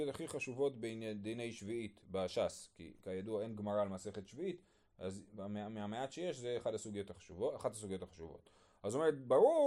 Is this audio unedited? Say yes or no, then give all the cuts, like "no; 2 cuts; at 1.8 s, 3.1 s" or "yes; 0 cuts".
yes; 0 cuts